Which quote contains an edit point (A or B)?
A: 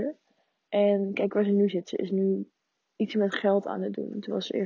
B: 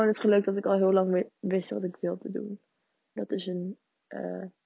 B